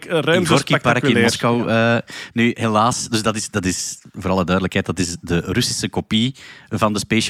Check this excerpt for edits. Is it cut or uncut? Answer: uncut